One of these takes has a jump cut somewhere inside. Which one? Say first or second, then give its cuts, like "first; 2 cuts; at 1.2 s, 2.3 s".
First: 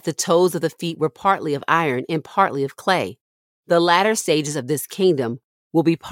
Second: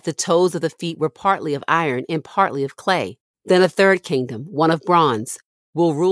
second; 1 cut; at 3.3 s